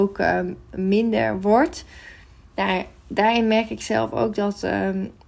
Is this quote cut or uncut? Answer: cut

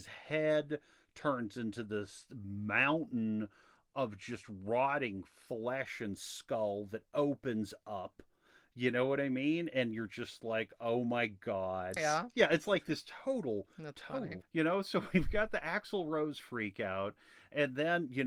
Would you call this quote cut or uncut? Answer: cut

